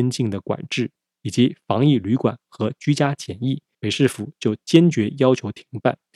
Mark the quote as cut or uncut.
cut